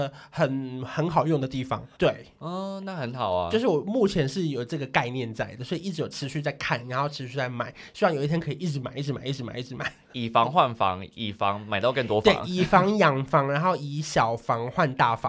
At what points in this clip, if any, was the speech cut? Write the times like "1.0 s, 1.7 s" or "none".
2.0 s